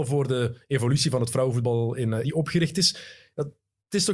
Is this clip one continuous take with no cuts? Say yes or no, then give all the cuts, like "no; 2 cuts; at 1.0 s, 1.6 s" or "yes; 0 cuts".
no; 1 cut; at 2.2 s